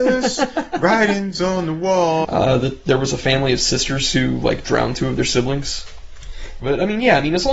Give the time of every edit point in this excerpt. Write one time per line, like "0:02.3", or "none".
0:02.2
0:06.6